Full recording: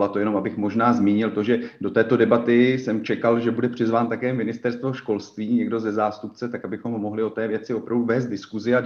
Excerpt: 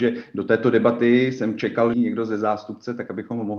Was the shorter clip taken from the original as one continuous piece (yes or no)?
no